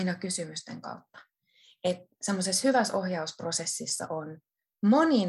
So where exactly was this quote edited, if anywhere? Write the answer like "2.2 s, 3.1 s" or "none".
none